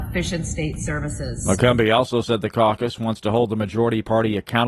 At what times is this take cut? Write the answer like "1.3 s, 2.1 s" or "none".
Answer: none